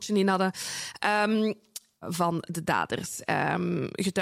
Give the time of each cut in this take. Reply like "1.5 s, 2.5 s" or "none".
2.0 s